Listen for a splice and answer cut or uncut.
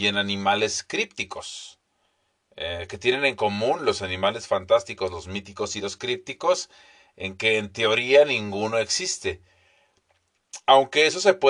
uncut